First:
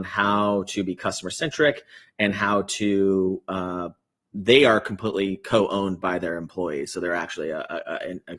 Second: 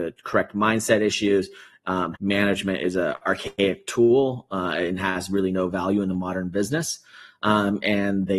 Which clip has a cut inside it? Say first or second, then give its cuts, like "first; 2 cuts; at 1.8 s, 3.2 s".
second; 1 cut; at 2.1 s